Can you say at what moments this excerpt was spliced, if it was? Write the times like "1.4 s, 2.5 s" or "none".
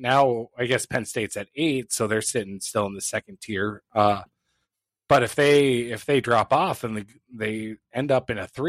none